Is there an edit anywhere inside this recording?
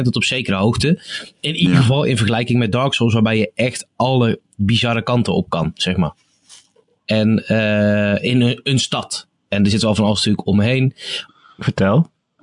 yes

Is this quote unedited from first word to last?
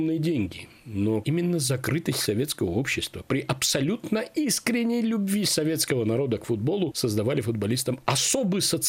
no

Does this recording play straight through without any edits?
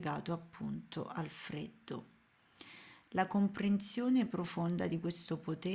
yes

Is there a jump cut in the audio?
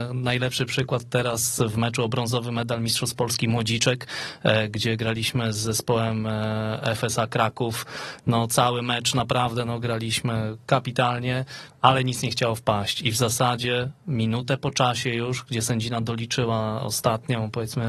no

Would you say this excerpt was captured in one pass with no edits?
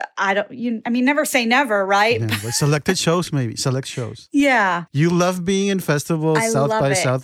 no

